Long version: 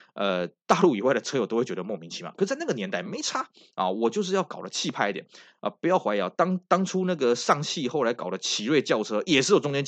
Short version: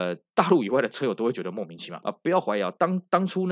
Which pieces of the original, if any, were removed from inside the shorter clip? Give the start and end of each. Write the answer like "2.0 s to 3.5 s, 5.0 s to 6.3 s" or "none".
2.4 s to 5.6 s